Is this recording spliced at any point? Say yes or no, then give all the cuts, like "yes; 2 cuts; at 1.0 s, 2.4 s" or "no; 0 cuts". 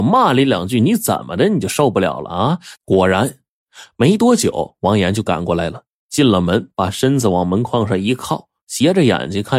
yes; 1 cut; at 2.8 s